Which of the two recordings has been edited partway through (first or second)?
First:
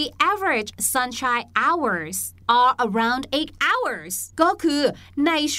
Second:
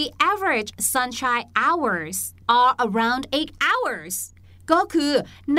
first